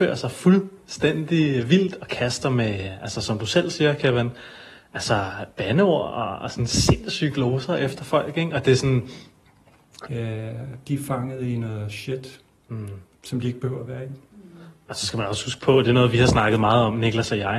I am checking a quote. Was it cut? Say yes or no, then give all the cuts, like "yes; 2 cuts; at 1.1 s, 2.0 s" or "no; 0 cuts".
yes; 1 cut; at 10.1 s